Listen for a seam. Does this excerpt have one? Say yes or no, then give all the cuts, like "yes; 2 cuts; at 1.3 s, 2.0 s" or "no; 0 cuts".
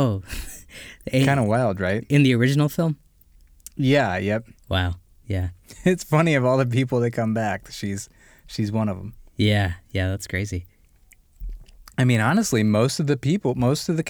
no; 0 cuts